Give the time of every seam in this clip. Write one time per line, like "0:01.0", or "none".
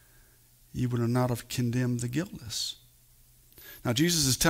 none